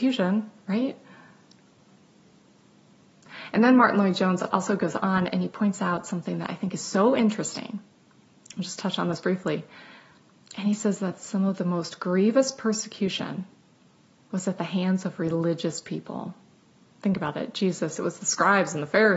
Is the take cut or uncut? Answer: uncut